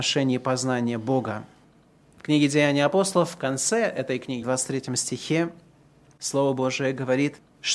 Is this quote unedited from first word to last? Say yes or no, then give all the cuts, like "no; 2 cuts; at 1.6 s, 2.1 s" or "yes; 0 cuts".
no; 2 cuts; at 2.0 s, 4.4 s